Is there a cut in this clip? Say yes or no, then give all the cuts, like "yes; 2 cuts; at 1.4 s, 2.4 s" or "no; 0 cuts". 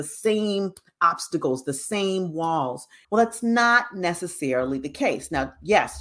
yes; 1 cut; at 3.0 s